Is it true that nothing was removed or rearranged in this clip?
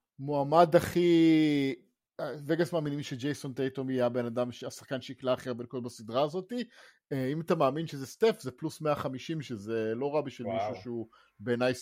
yes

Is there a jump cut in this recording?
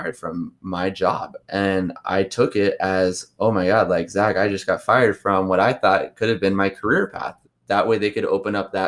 yes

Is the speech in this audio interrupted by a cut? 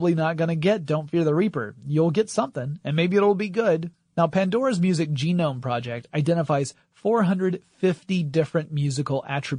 yes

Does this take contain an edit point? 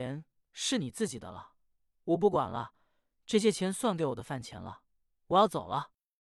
no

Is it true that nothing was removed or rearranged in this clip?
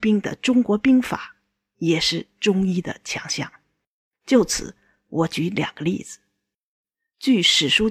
yes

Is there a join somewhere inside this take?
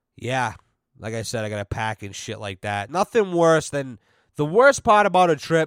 no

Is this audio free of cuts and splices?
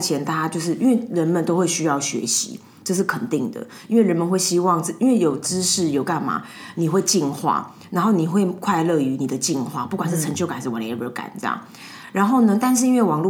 yes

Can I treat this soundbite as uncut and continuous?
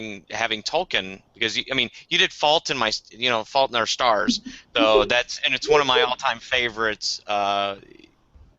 no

